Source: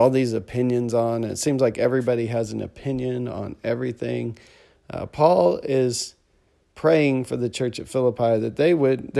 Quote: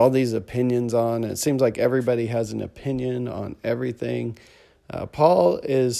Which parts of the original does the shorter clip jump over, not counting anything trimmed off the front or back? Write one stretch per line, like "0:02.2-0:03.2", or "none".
none